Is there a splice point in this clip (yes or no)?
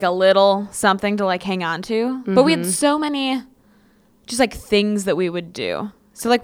no